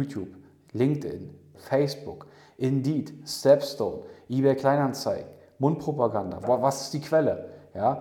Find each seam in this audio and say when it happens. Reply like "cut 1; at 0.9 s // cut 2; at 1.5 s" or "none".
cut 1; at 1.5 s // cut 2; at 6.4 s